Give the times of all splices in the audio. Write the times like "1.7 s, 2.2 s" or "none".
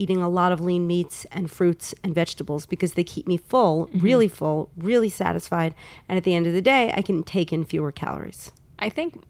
none